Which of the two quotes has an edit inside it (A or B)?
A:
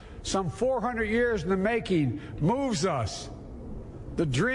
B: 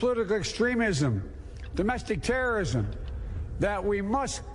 B